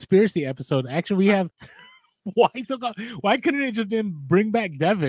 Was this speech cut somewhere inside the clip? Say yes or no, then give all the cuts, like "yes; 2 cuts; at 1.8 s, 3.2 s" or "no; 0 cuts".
yes; 1 cut; at 1.5 s